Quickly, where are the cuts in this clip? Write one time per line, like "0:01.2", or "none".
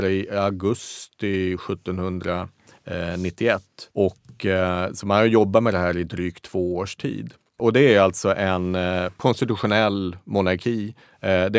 0:03.9